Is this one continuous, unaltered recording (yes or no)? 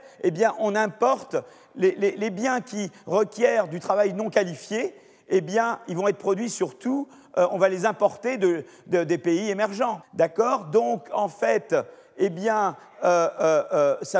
no